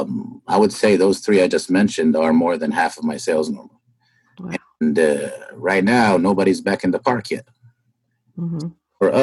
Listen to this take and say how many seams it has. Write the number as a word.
zero